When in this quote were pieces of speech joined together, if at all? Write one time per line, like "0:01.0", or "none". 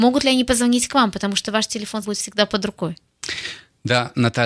0:02.0